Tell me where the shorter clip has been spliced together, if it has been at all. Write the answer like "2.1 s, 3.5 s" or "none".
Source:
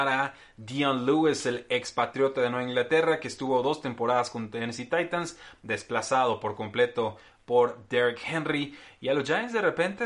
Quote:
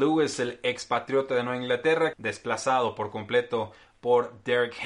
2.1 s